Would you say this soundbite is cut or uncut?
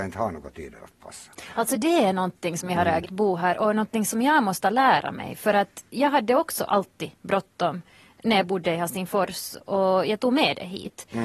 cut